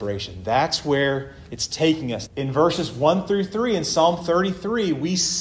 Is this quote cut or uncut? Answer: cut